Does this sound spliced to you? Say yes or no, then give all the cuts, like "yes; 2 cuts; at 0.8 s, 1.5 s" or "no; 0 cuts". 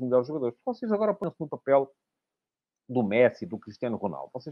no; 0 cuts